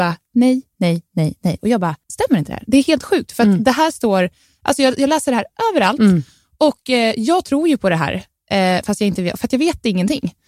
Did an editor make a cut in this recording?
yes; 1 cut; at 2.0 s

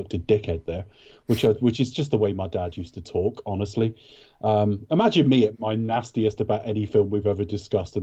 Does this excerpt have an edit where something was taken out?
no; 0 cuts

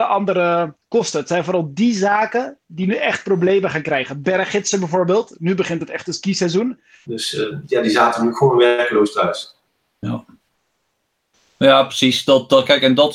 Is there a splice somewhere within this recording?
yes; 1 cut; at 7.0 s

